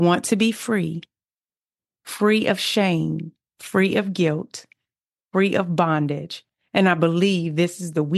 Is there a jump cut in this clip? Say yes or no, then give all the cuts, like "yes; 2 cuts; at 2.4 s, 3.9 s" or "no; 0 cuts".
no; 0 cuts